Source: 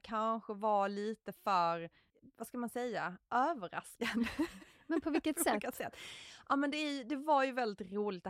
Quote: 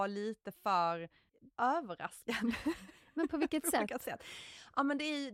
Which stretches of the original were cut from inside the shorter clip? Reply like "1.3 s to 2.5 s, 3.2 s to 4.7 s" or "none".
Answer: 2.3 s to 3.2 s